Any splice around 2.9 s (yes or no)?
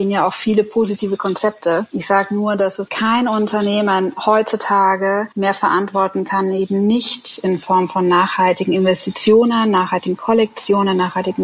yes